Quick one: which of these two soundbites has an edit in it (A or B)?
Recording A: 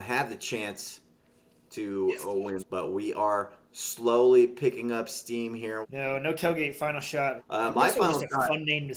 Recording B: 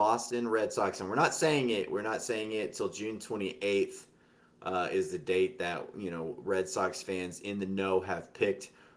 A